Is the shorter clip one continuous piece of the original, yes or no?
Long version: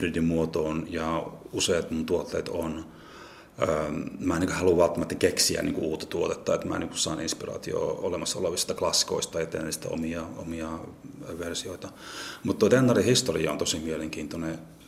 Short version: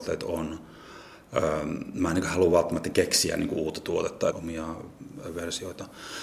no